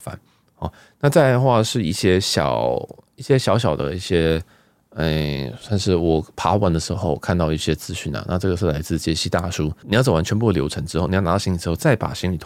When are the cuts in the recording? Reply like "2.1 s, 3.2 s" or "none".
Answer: 9.8 s